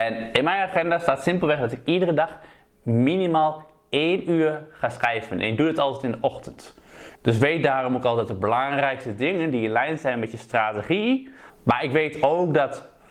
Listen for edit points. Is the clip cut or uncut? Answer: cut